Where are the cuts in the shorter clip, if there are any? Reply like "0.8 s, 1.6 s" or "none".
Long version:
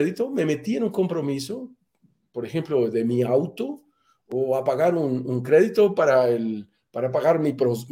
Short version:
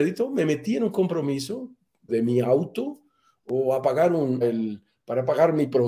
2.1 s, 4.4 s